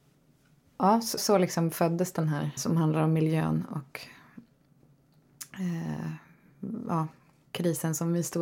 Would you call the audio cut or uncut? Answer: cut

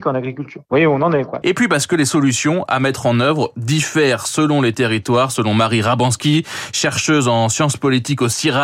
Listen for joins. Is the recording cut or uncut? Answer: cut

